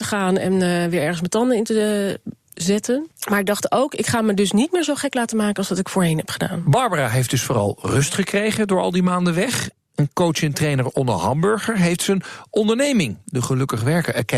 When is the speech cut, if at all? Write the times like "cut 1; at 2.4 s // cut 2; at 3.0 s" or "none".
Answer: none